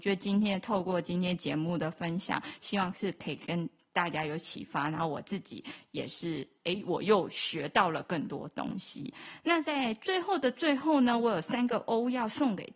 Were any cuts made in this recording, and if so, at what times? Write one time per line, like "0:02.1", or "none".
none